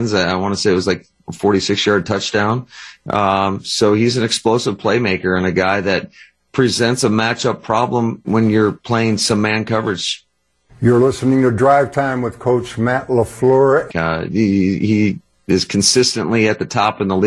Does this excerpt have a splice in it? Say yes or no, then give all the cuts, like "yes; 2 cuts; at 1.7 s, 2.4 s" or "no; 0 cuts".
yes; 2 cuts; at 8.2 s, 13.9 s